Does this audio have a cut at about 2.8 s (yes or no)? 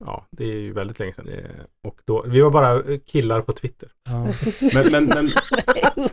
no